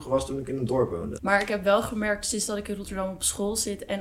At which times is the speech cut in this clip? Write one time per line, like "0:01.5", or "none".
0:01.2